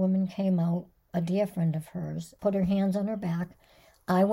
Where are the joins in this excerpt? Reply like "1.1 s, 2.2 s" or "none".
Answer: 2.4 s